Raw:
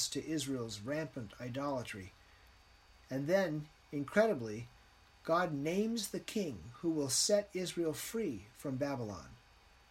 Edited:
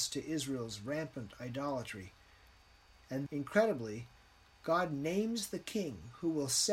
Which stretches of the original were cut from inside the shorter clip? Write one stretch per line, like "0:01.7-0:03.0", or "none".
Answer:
0:03.3-0:03.9